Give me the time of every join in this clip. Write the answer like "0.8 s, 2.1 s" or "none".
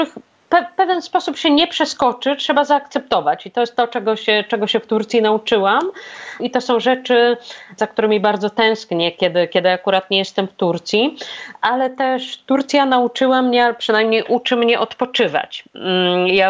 none